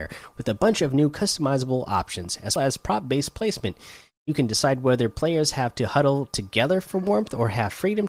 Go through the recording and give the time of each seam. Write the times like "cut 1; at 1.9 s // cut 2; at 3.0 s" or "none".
cut 1; at 2.6 s